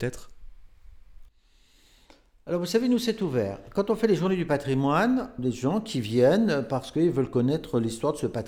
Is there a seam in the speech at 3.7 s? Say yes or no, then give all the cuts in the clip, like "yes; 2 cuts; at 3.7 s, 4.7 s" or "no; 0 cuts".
no; 1 cut; at 5.4 s